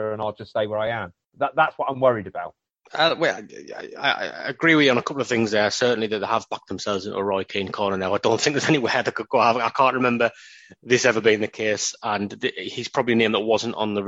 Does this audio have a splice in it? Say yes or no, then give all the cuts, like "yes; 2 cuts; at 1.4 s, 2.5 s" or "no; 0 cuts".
no; 0 cuts